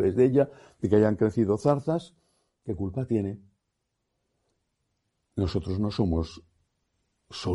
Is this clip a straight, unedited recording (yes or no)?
yes